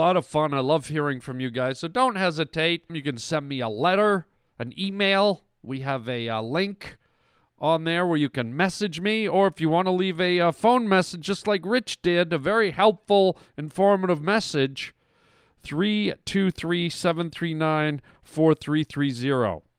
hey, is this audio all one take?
no; 1 cut; at 2.9 s

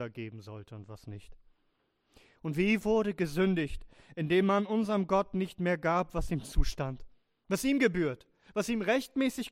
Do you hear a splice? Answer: no; 0 cuts

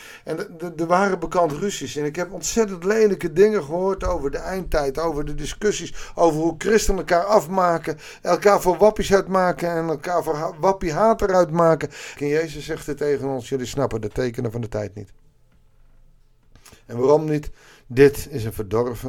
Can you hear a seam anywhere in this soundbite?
yes; 1 cut; at 12.2 s

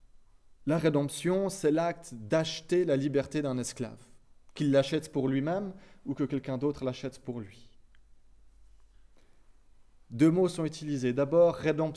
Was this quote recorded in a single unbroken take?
no; 1 cut; at 10.0 s

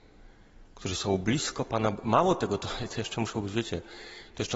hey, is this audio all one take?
yes; 0 cuts

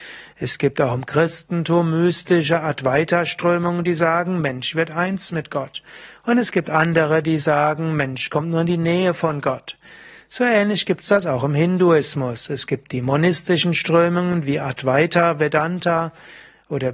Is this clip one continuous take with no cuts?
yes; 0 cuts

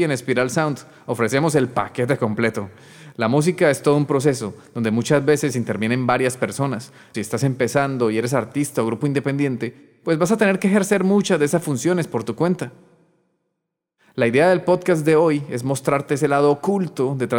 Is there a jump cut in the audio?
yes; 1 cut; at 7.1 s

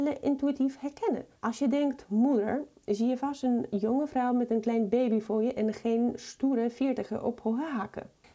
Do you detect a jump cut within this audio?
yes; 1 cut; at 1.4 s

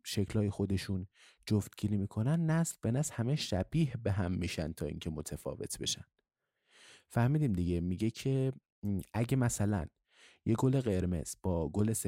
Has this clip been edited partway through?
no; 0 cuts

